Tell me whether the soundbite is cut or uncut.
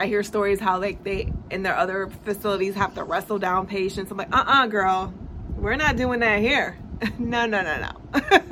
uncut